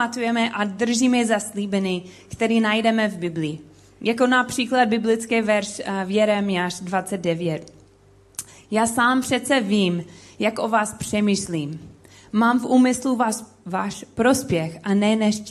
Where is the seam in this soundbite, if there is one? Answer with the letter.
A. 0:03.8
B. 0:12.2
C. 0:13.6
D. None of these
C